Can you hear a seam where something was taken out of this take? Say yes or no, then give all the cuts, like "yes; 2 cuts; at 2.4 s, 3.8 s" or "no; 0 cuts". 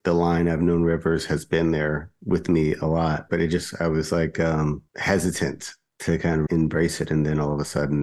yes; 3 cuts; at 3.3 s, 4.9 s, 6.5 s